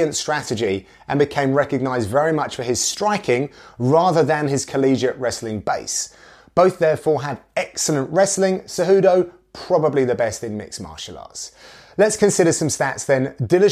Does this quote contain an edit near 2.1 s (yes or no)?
no